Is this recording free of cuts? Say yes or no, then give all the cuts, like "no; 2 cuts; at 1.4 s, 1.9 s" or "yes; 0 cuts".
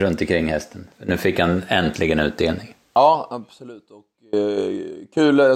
yes; 0 cuts